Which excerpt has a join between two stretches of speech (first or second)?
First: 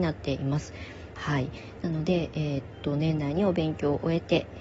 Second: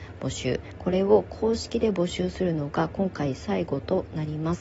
first